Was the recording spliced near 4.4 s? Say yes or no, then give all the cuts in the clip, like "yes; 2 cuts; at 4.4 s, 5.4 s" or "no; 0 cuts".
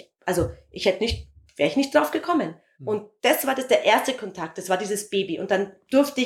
no; 1 cut; at 2.7 s